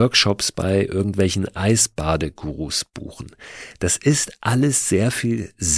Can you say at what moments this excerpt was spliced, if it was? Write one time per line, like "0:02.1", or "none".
none